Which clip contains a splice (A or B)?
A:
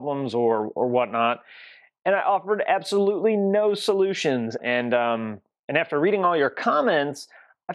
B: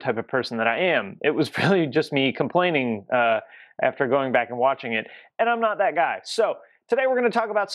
A